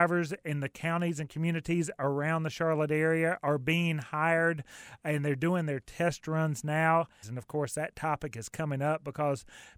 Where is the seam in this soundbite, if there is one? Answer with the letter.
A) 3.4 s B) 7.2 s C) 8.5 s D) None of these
B